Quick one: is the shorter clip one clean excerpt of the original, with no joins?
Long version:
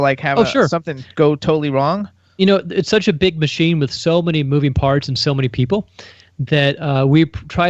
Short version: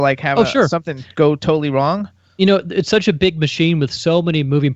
yes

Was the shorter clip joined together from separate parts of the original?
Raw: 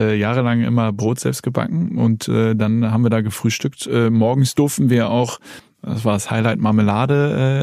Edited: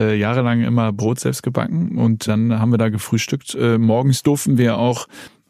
yes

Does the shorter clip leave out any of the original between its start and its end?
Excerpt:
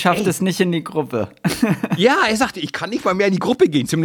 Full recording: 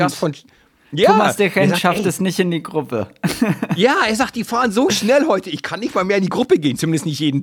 yes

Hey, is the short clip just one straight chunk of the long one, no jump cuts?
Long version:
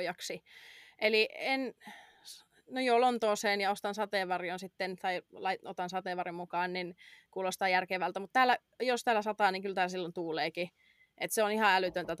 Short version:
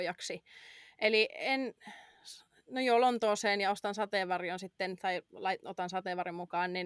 yes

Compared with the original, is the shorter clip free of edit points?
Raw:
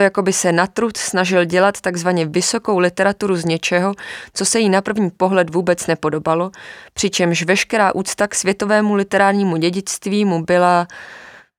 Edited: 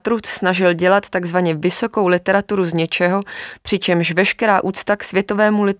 no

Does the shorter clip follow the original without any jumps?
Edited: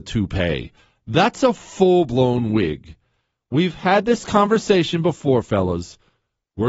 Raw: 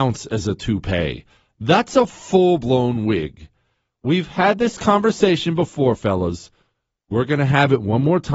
yes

